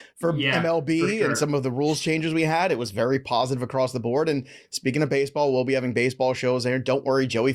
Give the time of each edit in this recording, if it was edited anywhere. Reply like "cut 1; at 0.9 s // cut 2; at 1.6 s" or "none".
none